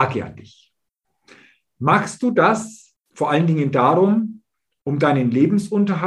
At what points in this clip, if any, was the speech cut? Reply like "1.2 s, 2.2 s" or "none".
1.7 s, 3.0 s